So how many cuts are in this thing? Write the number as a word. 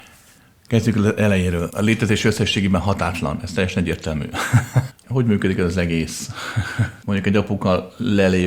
three